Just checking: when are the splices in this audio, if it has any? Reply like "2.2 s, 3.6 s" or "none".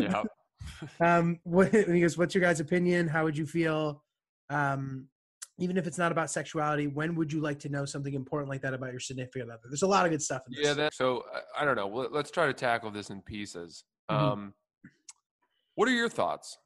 10.9 s